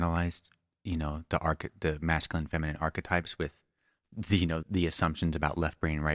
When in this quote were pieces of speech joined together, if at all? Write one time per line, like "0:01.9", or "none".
0:04.6